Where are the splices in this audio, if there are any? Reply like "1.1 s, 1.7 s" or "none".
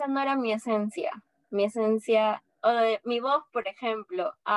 none